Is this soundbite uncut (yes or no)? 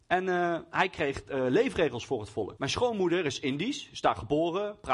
no